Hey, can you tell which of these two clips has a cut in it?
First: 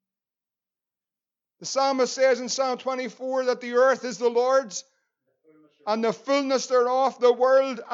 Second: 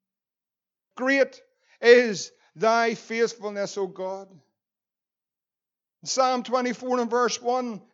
second; 1 cut; at 0.9 s

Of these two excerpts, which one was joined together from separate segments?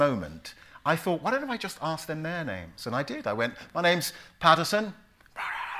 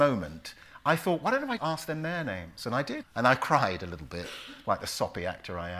second; 2 cuts; at 1.6 s, 3.0 s

